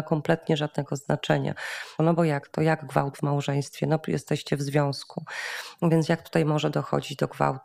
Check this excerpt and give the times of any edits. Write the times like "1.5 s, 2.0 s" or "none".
2.0 s